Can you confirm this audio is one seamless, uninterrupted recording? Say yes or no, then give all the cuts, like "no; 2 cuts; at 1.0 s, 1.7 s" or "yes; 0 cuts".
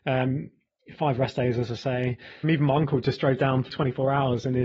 no; 2 cuts; at 2.4 s, 3.7 s